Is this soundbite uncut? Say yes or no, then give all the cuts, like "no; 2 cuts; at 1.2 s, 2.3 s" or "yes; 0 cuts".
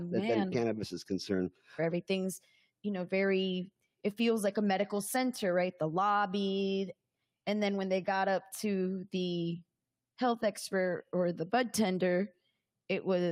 no; 1 cut; at 1.8 s